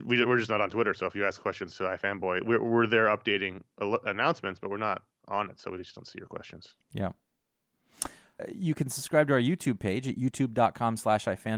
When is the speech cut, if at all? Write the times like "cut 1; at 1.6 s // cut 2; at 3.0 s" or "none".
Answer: cut 1; at 8.4 s